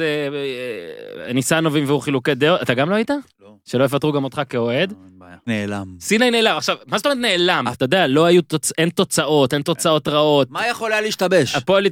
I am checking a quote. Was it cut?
yes; 2 cuts; at 5.5 s, 7.7 s

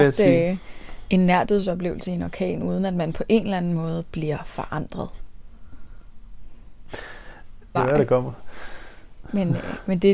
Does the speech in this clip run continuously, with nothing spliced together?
no; 1 cut; at 7.7 s

